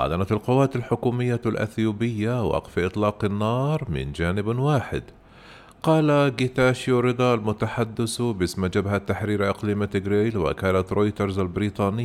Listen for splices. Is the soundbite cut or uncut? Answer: uncut